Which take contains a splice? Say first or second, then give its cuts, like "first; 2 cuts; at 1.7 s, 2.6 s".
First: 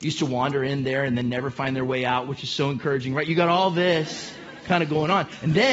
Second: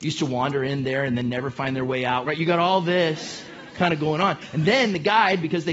second; 1 cut; at 2.2 s